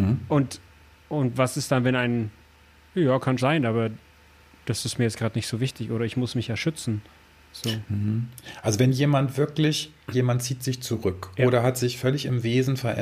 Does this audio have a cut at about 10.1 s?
yes; 2 cuts; at 3.4 s, 10.1 s

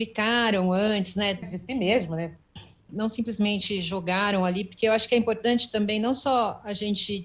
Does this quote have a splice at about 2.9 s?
yes; 2 cuts; at 1.4 s, 2.9 s

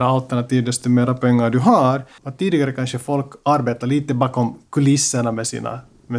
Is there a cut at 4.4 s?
no; 1 cut; at 2.2 s

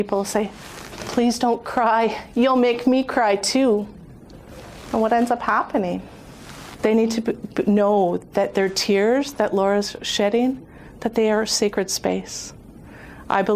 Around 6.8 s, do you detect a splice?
yes; 1 cut; at 6.8 s

